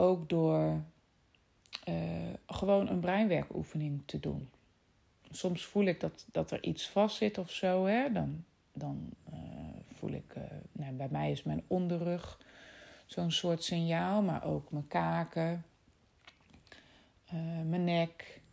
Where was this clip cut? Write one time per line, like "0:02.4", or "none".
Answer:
none

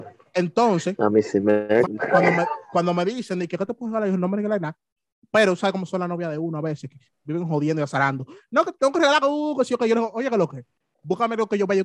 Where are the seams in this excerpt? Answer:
0:01.8

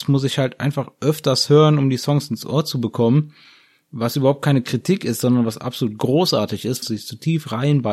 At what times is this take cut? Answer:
0:06.8

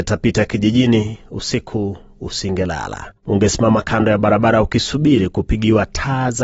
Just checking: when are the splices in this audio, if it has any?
0:03.2

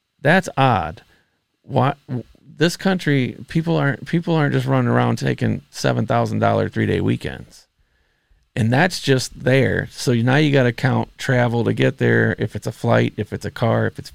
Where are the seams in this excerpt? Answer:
none

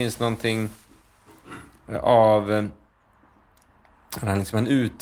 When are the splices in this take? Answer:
none

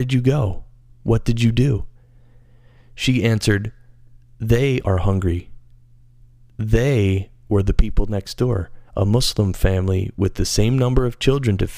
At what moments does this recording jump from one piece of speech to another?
0:04.8
0:08.9

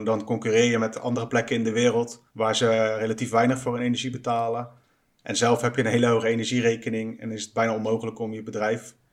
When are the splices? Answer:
0:02.3

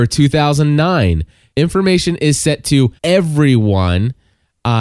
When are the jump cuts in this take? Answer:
0:01.5
0:03.0

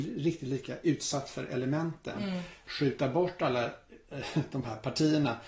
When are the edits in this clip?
0:02.7

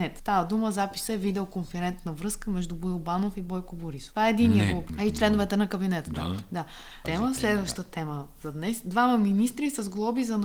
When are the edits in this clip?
0:04.9
0:07.0

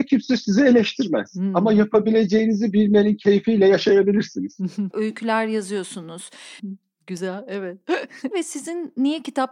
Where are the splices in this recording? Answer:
0:04.9
0:06.6
0:08.3

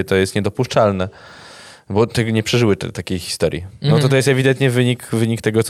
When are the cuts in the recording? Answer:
none

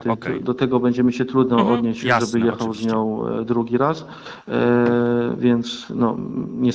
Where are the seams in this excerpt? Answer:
none

